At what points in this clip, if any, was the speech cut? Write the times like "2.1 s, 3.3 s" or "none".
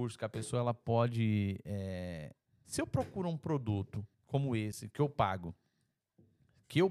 2.5 s, 4.1 s